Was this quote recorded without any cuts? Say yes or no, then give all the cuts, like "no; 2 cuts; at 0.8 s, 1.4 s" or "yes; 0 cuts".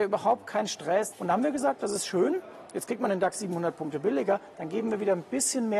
no; 1 cut; at 1.1 s